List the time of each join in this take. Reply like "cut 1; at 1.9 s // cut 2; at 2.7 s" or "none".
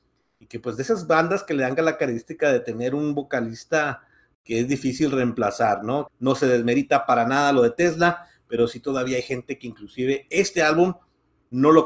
cut 1; at 6.1 s